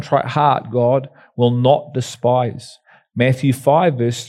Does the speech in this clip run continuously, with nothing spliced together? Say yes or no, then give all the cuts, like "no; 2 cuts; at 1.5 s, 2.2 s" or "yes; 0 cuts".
yes; 0 cuts